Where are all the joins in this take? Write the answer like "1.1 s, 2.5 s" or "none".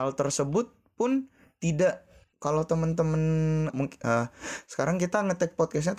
3.7 s